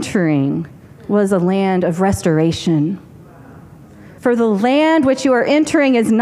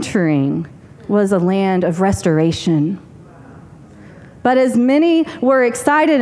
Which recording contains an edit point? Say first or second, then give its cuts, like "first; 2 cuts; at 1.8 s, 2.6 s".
first; 1 cut; at 4.2 s